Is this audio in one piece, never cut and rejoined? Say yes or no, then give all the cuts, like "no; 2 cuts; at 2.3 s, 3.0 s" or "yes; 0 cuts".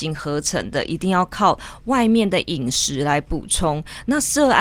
yes; 0 cuts